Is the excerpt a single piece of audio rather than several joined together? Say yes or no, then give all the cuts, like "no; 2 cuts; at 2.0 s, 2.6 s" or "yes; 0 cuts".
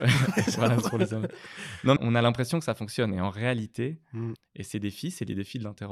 no; 2 cuts; at 2.0 s, 4.4 s